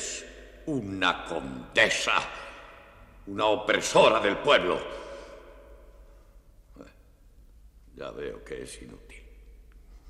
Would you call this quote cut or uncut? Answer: uncut